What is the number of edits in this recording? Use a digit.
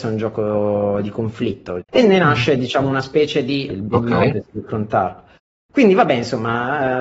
2